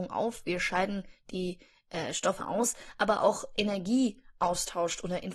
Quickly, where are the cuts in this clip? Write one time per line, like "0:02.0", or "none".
0:02.4